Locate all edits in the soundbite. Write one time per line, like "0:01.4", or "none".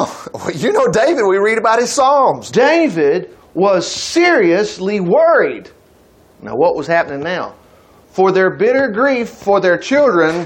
0:02.5